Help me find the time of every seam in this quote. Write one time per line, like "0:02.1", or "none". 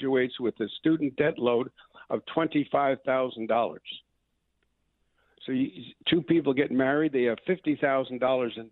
none